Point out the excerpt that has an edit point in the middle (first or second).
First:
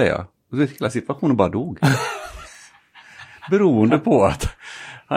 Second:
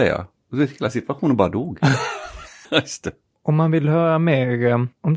second